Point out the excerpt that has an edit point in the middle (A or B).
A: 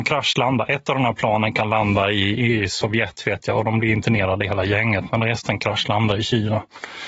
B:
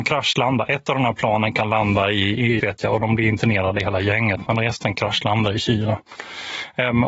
B